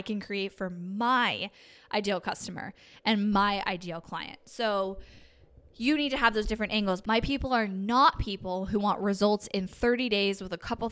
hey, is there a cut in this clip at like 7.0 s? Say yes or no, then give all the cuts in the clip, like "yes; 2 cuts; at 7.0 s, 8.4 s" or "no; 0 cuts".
yes; 1 cut; at 7.0 s